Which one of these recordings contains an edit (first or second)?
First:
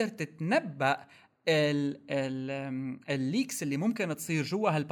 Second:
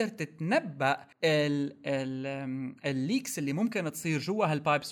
second